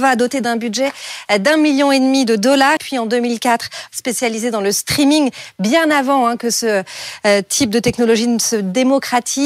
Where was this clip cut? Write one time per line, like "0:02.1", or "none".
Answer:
0:02.8
0:03.9